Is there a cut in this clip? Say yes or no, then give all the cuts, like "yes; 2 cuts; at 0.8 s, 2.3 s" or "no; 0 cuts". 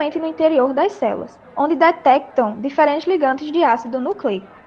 yes; 1 cut; at 1.4 s